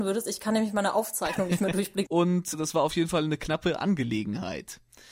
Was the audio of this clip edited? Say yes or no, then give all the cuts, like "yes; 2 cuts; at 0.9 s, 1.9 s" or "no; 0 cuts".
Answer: yes; 1 cut; at 2.0 s